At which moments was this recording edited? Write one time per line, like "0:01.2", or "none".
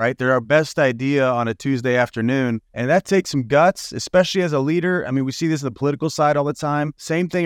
0:02.7